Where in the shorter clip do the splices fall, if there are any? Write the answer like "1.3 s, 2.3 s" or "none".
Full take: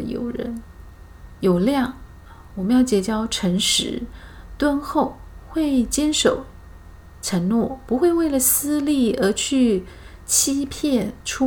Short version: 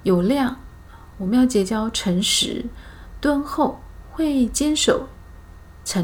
none